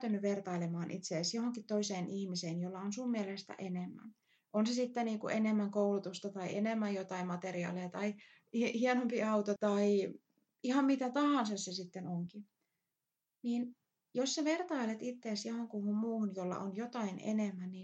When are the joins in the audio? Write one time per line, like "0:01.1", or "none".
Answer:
0:09.6